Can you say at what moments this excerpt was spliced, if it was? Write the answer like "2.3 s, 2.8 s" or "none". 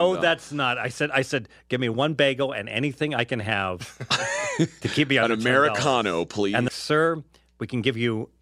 6.7 s